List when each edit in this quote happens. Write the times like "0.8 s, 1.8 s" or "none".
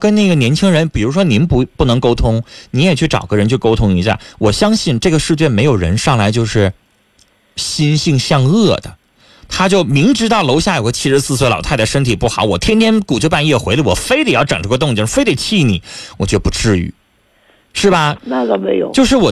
18.2 s